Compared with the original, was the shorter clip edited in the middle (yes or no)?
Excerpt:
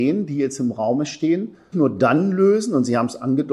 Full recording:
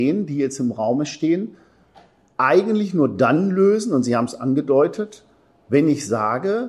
yes